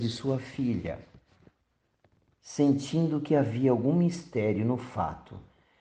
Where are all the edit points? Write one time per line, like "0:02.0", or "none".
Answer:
0:02.3